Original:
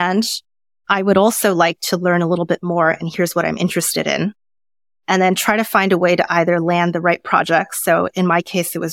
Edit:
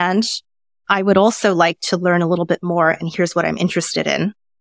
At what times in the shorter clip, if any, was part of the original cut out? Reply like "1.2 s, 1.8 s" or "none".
none